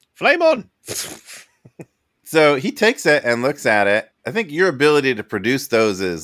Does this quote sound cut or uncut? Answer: uncut